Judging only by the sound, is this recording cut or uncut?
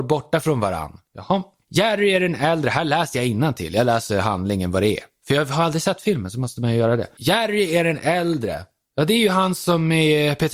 uncut